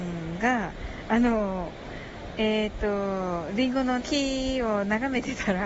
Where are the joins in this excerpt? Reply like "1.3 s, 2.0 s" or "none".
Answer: 4.0 s